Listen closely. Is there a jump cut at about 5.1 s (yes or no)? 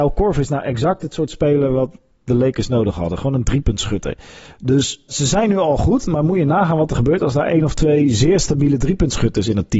yes